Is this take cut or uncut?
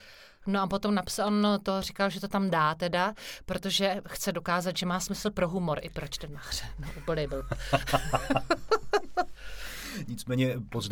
uncut